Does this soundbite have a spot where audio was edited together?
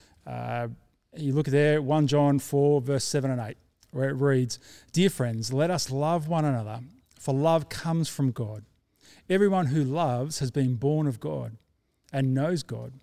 no; 0 cuts

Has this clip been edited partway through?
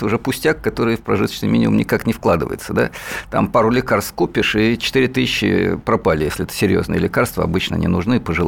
no; 0 cuts

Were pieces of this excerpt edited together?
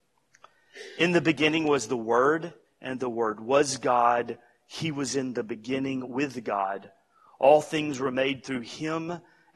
yes; 1 cut; at 2.7 s

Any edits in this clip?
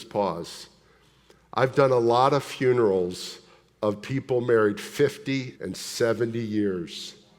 yes; 1 cut; at 5.5 s

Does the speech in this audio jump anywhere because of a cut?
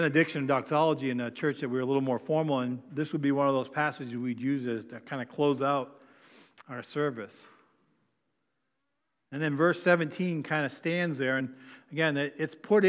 no; 0 cuts

